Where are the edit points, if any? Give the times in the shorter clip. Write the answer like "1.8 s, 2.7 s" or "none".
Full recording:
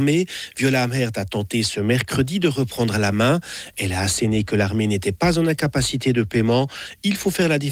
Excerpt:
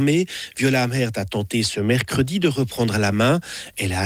none